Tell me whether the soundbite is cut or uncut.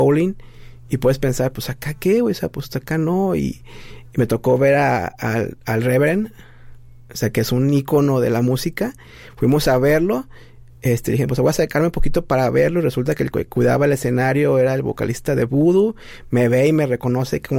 uncut